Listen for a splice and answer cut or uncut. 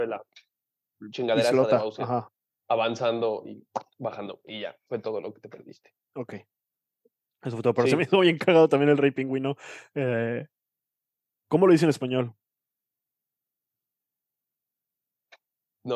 uncut